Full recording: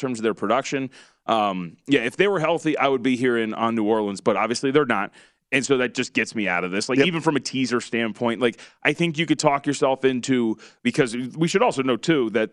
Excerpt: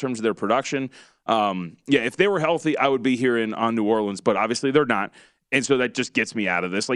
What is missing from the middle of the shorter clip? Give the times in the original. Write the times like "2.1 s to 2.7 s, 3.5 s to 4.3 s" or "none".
none